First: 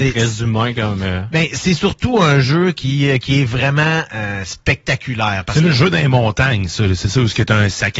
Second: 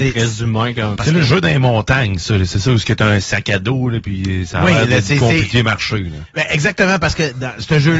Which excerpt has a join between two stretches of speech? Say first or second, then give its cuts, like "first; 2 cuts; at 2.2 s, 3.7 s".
second; 1 cut; at 1.0 s